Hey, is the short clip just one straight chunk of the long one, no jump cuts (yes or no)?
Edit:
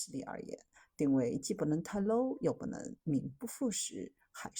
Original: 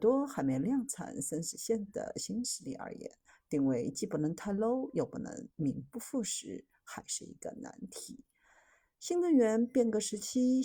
yes